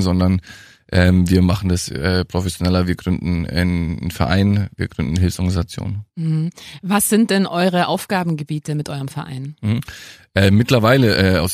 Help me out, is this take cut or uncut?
uncut